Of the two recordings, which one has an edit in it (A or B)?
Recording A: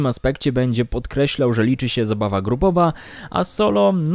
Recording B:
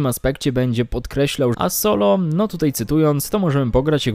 B